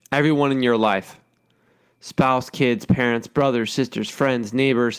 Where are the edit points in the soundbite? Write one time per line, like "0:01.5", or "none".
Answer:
none